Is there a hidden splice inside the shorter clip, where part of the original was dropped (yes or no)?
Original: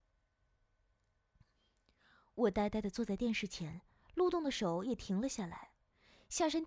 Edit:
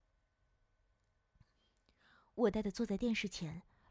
yes